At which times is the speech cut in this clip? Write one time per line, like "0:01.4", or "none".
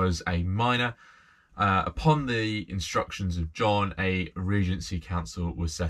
none